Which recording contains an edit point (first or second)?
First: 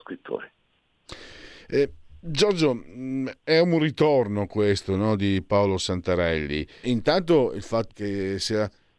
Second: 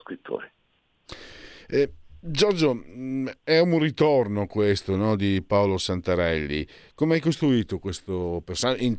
first